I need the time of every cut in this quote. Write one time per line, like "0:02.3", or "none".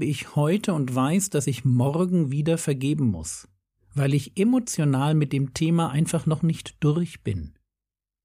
none